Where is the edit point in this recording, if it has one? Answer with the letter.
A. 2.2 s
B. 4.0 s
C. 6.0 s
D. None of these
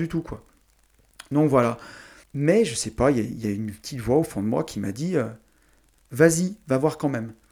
A